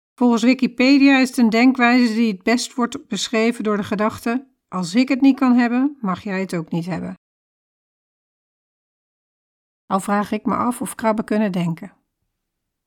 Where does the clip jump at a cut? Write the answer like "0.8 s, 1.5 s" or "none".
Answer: none